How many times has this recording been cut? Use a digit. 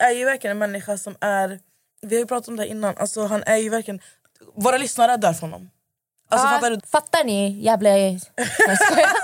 1